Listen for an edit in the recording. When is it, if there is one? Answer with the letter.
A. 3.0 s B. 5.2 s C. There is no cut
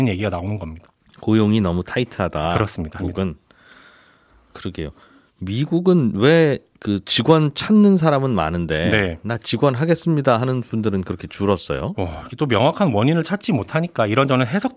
A